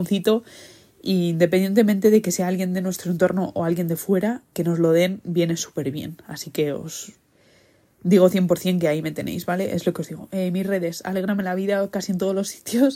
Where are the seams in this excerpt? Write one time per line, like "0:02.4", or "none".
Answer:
0:04.5